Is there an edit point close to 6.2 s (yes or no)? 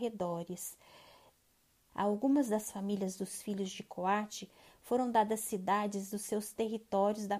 no